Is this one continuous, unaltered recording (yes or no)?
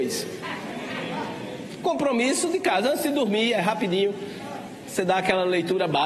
yes